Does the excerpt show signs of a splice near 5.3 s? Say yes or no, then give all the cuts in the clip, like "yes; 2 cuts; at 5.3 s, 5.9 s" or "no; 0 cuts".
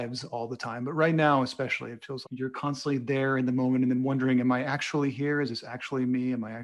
no; 1 cut; at 2.2 s